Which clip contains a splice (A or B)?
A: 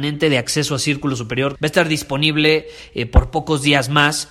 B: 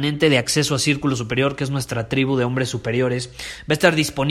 A